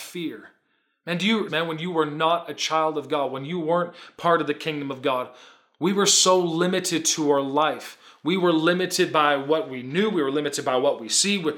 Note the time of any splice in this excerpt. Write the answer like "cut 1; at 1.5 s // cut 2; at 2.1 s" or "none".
cut 1; at 1.5 s

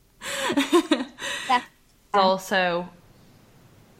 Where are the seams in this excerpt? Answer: cut 1; at 2.1 s

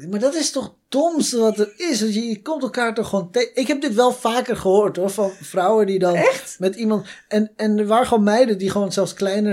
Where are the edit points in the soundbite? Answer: none

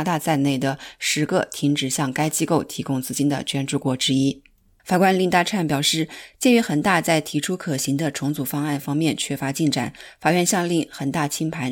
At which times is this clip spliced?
cut 1; at 4.8 s

